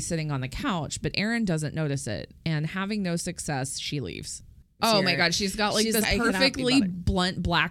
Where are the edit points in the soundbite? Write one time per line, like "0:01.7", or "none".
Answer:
0:04.8
0:06.0